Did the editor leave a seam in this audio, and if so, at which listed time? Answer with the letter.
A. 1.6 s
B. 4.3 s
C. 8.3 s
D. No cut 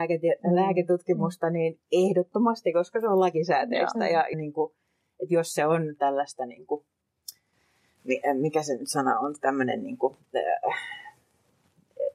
B